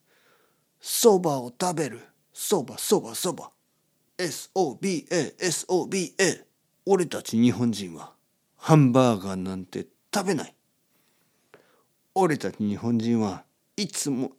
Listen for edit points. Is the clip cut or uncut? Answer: cut